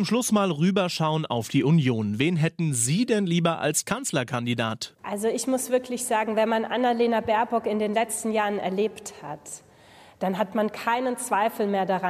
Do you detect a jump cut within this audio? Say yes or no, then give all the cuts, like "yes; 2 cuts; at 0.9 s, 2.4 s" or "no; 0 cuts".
yes; 1 cut; at 4.9 s